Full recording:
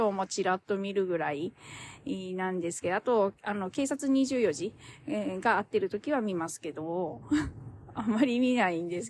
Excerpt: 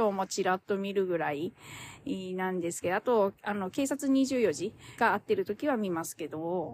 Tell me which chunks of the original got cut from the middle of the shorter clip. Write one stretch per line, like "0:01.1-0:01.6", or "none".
0:05.0-0:05.4